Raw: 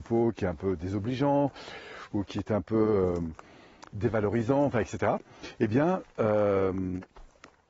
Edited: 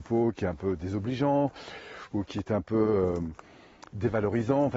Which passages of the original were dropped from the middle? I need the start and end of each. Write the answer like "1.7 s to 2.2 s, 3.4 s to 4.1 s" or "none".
none